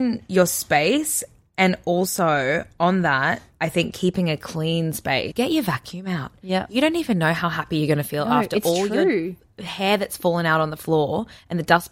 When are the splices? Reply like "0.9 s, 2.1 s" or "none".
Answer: 5.3 s